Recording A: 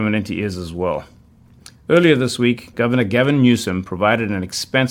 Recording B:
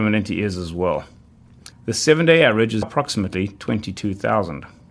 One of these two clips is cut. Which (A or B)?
B